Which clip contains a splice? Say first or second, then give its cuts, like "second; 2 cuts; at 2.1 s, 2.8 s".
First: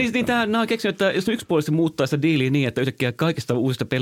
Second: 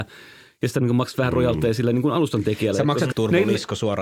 second; 1 cut; at 3.1 s